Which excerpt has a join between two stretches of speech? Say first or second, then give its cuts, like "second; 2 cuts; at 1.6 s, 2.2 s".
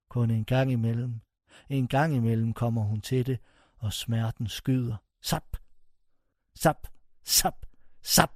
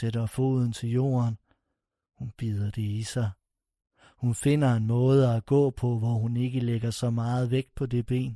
first; 1 cut; at 6.3 s